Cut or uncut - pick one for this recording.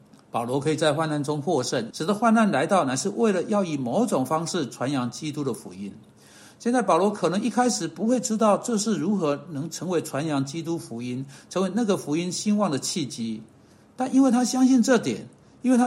cut